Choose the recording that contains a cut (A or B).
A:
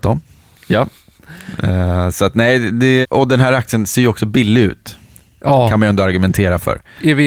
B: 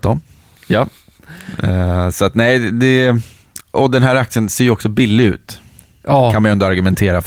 A